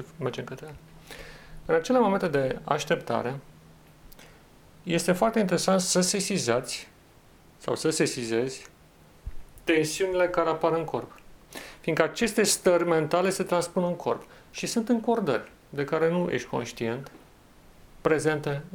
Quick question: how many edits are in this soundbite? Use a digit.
1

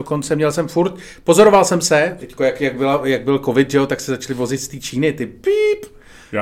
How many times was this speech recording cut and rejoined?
1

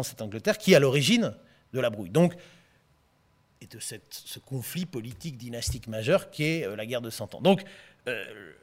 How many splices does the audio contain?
0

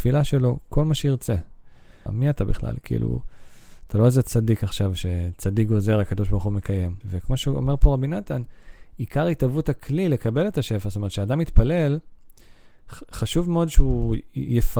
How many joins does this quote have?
2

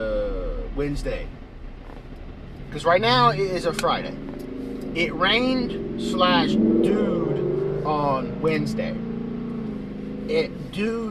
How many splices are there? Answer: 0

